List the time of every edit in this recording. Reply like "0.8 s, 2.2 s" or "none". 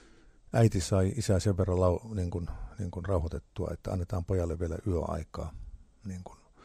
none